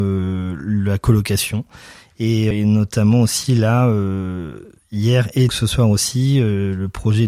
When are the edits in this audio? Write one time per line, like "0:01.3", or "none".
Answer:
0:02.5
0:05.5